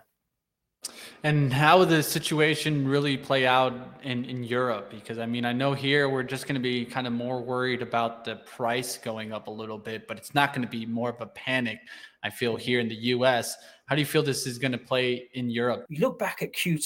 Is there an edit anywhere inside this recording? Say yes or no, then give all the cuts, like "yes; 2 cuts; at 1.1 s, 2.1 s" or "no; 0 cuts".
yes; 1 cut; at 15.9 s